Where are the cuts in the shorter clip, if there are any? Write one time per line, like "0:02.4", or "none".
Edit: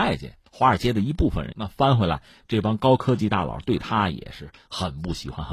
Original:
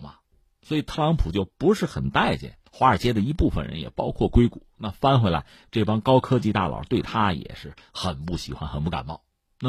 0:01.5